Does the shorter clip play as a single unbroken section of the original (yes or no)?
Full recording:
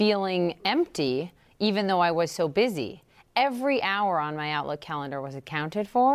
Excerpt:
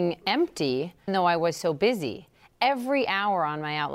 no